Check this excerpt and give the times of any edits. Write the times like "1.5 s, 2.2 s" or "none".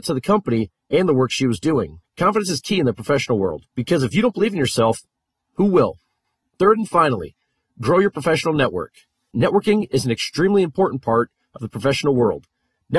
none